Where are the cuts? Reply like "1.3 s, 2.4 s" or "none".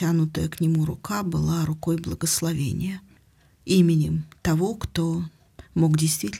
none

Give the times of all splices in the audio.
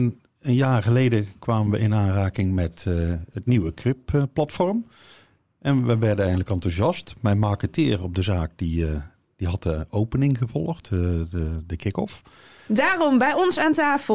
12.7 s

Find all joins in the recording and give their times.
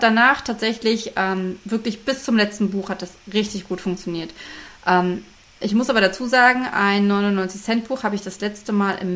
none

